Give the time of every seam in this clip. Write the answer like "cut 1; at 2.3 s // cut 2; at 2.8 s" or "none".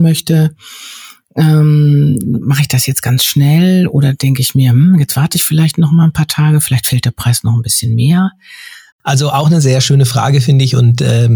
cut 1; at 8.9 s